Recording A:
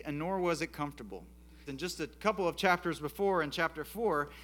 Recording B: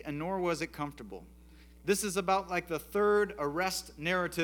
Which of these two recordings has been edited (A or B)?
A